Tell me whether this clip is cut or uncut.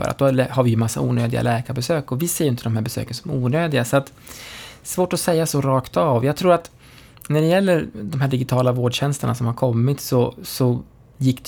uncut